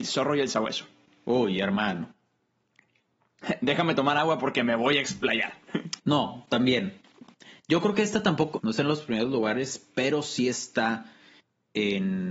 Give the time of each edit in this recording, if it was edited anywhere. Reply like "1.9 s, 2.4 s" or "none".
6.0 s, 8.6 s